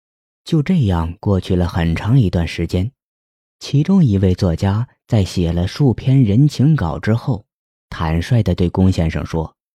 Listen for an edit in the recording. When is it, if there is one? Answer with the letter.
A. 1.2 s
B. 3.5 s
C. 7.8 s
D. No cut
D